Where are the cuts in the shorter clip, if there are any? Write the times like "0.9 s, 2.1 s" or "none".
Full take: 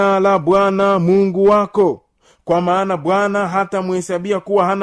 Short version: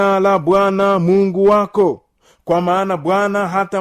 none

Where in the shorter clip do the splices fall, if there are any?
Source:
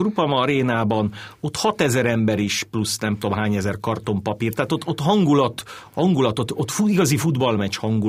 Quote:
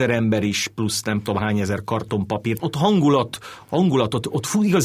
2.6 s

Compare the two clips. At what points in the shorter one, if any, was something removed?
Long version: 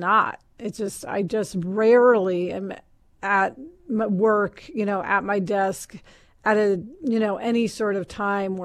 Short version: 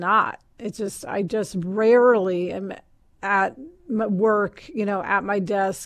none

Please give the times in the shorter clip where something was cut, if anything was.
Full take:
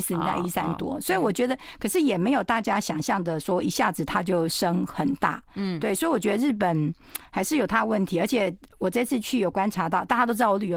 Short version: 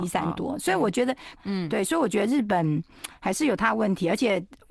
1.3 s

